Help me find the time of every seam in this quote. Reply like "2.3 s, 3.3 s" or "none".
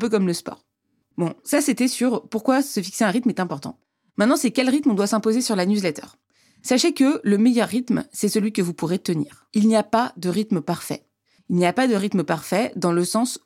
none